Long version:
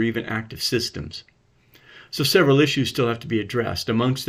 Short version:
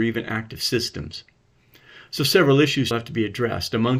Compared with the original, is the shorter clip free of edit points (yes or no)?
no